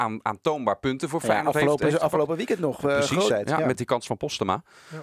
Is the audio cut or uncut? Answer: cut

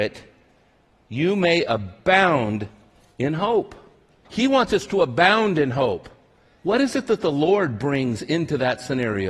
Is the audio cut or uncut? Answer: cut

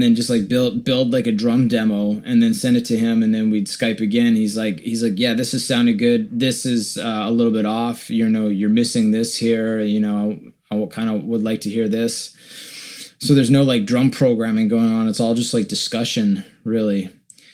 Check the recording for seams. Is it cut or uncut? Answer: uncut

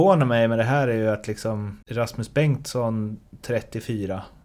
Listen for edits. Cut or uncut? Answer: cut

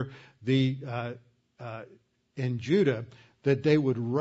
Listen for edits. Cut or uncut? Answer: uncut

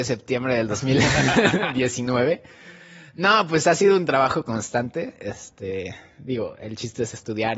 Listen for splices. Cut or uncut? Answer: uncut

